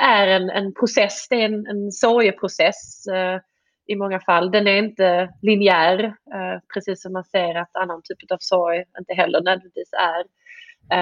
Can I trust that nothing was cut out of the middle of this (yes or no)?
yes